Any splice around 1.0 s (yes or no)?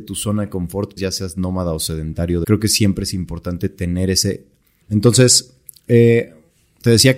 yes